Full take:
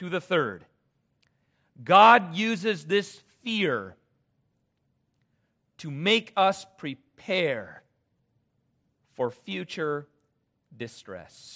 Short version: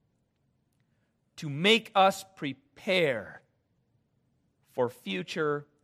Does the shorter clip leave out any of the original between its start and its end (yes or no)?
no